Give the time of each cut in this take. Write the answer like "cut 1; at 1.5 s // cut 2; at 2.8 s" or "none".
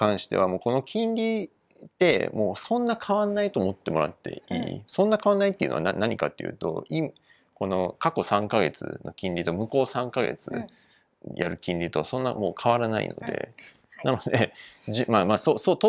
cut 1; at 13.8 s